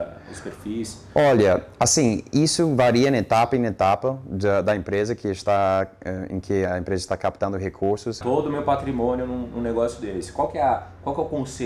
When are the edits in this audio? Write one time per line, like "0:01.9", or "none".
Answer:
0:08.2